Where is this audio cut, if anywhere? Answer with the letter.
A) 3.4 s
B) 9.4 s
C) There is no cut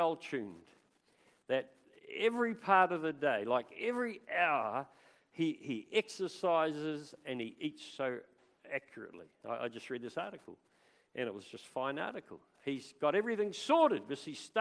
C